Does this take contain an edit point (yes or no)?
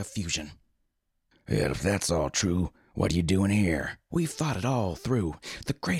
yes